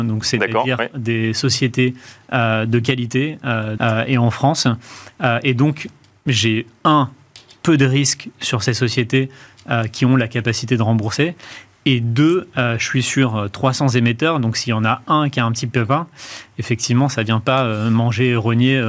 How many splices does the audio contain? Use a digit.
1